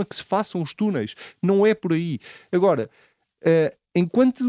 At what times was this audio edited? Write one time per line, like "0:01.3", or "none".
none